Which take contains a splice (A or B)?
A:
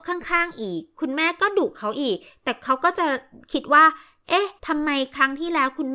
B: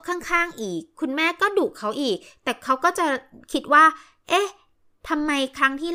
A